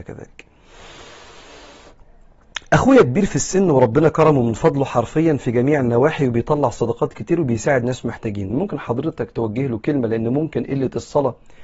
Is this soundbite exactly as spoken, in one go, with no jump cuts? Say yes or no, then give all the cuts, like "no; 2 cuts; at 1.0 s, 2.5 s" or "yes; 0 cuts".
no; 1 cut; at 8.5 s